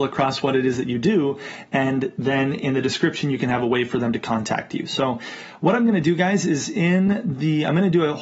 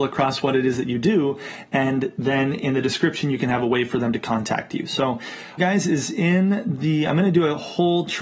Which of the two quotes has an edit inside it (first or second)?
second